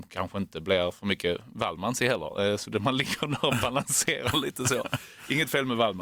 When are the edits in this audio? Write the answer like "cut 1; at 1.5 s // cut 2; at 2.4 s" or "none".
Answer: none